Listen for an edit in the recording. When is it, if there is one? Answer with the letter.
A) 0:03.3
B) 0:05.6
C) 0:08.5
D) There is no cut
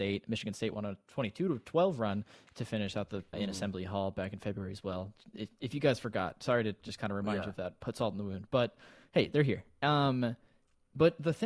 A